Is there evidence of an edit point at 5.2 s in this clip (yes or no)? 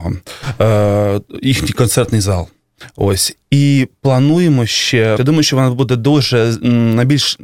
yes